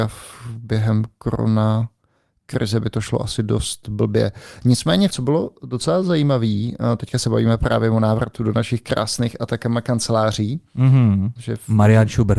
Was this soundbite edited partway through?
yes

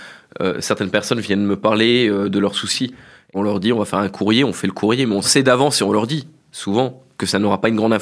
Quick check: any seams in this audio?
no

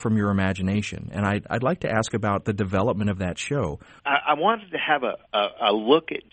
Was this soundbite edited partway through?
yes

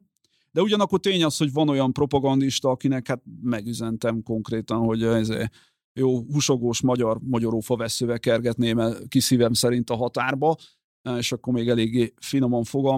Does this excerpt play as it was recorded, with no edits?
yes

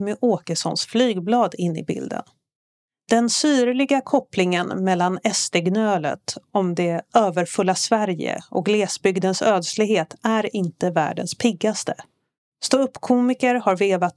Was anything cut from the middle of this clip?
no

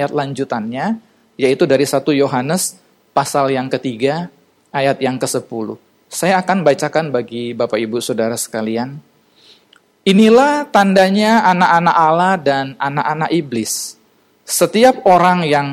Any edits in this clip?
no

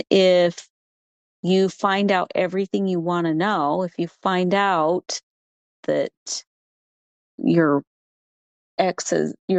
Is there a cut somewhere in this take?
no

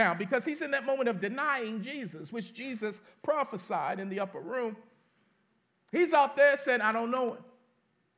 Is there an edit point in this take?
no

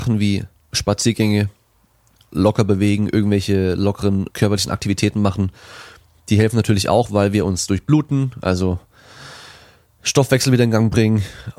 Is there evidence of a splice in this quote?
yes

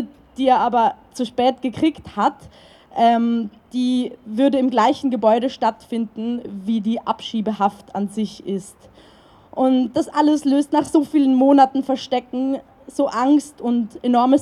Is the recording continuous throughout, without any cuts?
yes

